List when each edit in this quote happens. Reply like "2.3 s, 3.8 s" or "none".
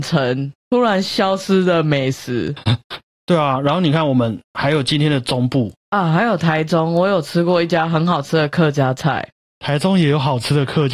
none

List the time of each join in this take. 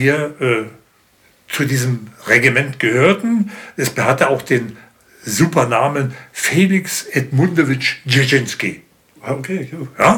9.2 s

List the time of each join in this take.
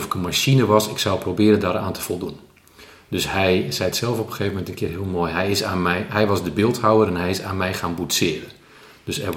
none

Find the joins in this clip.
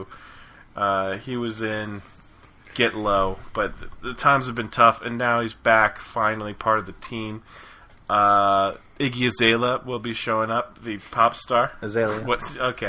none

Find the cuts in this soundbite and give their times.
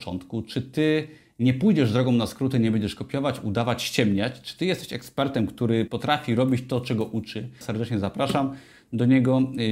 5.9 s, 7.6 s

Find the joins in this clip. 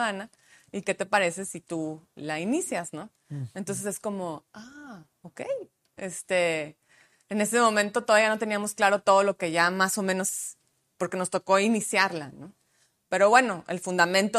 none

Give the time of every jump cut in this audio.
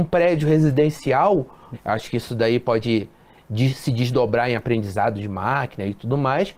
1.7 s

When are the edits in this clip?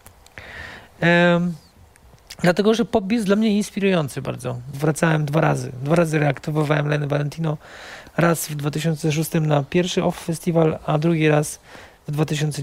4.7 s

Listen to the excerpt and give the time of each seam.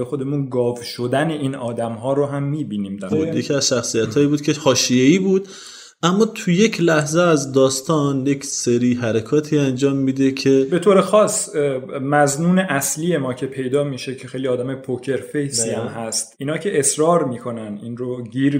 3.1 s

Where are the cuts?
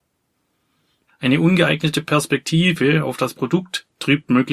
1.1 s

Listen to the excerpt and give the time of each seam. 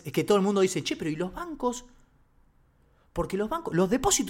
none

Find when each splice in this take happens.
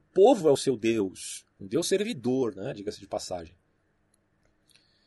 1.6 s

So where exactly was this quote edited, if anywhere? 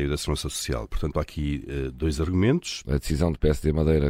2.8 s

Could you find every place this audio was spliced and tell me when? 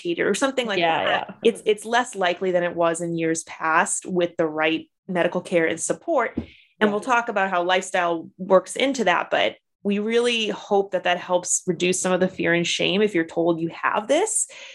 1.4 s, 5.0 s

